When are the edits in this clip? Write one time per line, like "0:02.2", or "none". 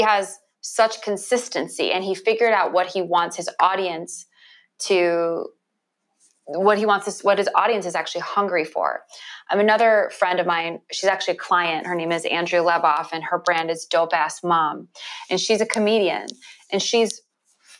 none